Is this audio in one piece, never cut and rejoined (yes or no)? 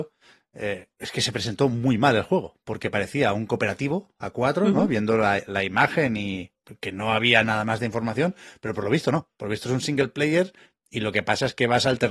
yes